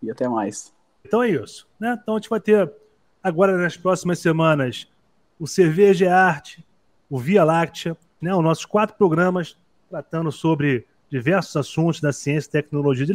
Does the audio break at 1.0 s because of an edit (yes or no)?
yes